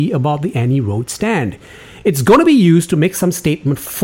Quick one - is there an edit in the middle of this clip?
no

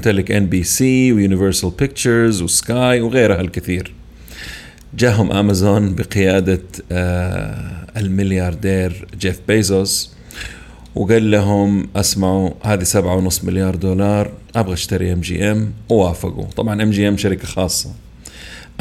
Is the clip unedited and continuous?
no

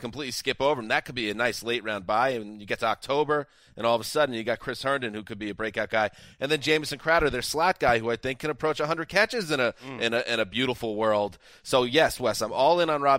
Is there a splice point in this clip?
no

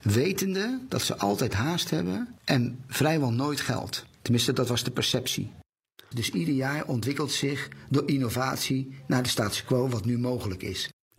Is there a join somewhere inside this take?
yes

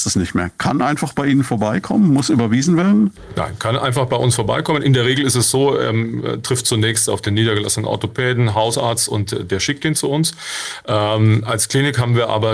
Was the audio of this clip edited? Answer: no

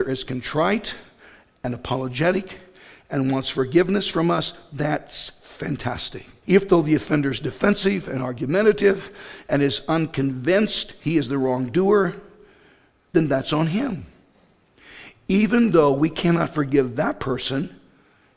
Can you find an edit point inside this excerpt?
yes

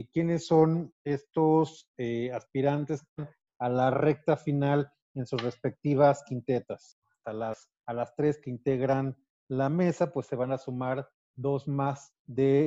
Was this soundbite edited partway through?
yes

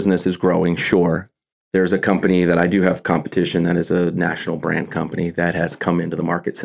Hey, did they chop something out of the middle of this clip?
no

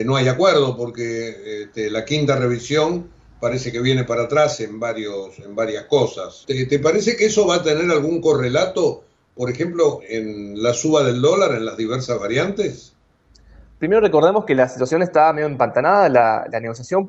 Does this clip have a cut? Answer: yes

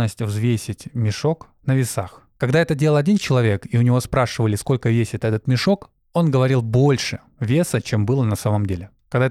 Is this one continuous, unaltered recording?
yes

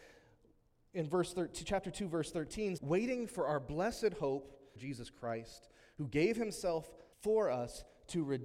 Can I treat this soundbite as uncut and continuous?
no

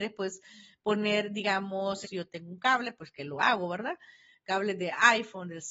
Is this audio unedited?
no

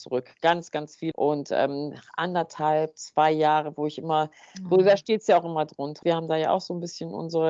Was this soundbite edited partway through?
yes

